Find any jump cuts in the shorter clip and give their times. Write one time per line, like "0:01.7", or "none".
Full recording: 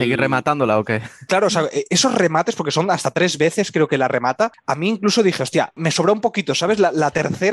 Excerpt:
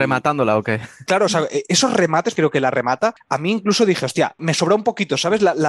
0:02.3